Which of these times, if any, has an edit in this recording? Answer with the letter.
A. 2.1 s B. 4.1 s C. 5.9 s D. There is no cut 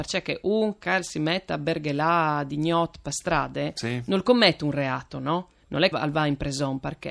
C